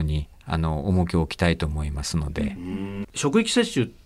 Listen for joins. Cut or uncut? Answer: cut